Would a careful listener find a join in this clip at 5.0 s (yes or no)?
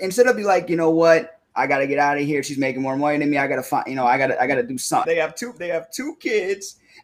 yes